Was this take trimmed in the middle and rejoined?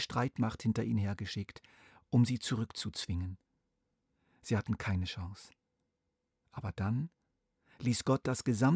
no; 0 cuts

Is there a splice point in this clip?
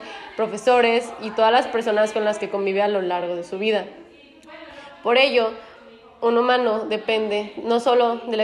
no; 0 cuts

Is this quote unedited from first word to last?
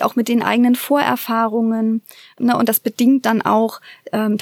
yes; 0 cuts

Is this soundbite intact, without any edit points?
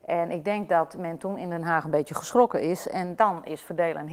yes; 0 cuts

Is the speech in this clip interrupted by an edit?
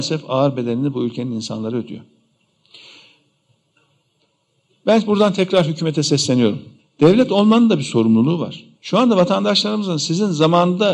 yes; 2 cuts; at 6.8 s, 8.7 s

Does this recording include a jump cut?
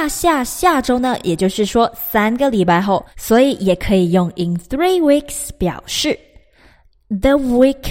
no; 0 cuts

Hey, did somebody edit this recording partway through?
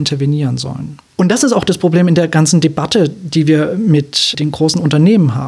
no; 0 cuts

